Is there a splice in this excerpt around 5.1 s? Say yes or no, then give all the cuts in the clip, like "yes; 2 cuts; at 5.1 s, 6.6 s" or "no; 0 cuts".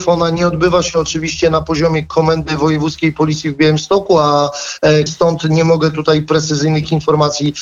yes; 1 cut; at 5.1 s